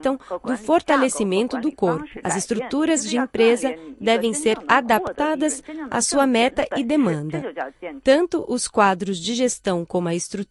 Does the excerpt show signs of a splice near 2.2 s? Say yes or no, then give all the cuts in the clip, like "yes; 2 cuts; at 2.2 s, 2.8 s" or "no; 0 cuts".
yes; 1 cut; at 2.2 s